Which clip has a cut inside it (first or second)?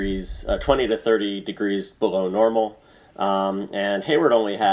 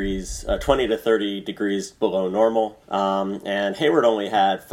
second